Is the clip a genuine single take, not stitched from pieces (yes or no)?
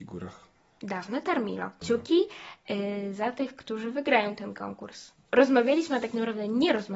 no